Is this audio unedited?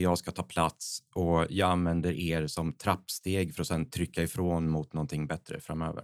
yes; 0 cuts

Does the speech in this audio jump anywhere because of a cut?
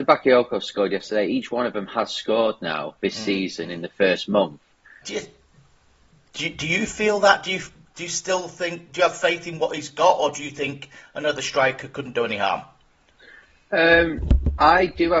yes; 1 cut; at 5.0 s

